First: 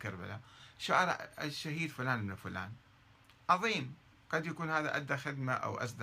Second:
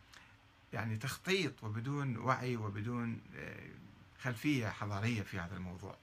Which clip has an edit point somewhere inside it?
second; 1 cut; at 4.1 s

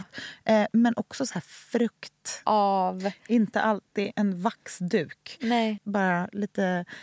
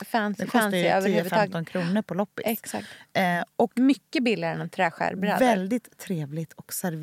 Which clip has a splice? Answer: first; 2 cuts; at 2.5 s, 5.8 s

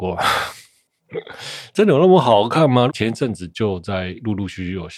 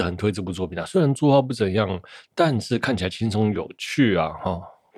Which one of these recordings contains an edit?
first; 1 cut; at 2.9 s

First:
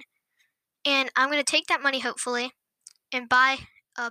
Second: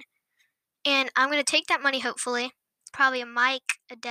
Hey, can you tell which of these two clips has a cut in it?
second; 1 cut; at 2.9 s

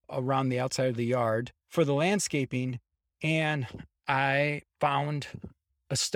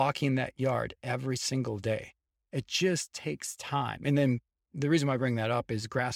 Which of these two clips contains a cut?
first; 1 cut; at 4.7 s

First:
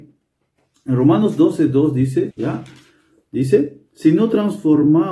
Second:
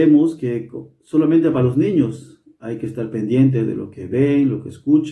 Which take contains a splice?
first; 1 cut; at 2.3 s

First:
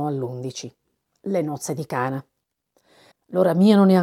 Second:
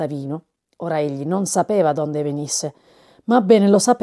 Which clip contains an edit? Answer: first; 1 cut; at 3.1 s

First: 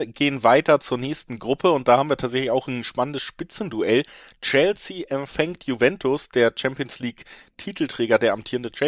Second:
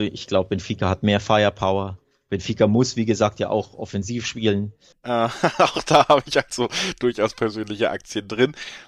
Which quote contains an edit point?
second; 1 cut; at 4.9 s

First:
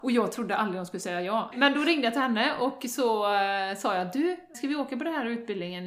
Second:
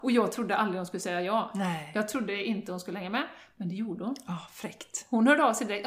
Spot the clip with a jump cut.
first; 2 cuts; at 1.5 s, 4.5 s

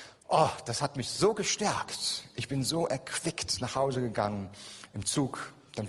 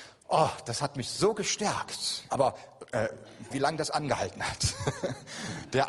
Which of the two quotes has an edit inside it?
second; 2 cuts; at 2.3 s, 3.5 s

